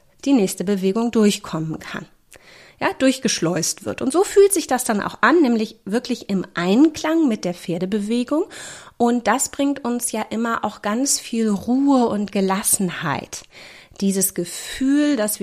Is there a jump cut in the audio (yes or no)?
no